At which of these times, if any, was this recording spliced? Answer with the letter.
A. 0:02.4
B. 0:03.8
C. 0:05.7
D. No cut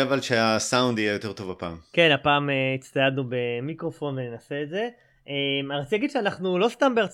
D